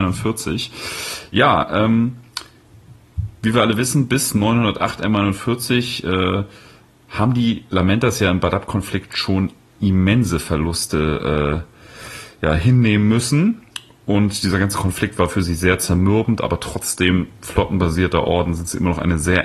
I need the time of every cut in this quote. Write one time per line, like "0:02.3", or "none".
none